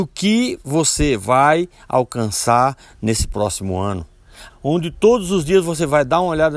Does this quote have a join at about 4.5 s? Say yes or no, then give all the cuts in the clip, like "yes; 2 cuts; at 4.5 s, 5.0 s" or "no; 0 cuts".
yes; 1 cut; at 4.5 s